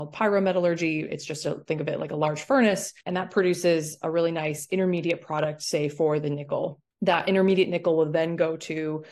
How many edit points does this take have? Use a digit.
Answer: 2